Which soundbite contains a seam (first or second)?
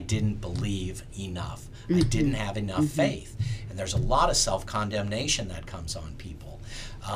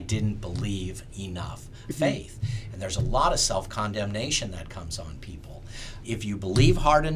second